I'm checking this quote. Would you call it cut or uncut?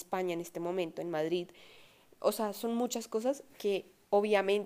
uncut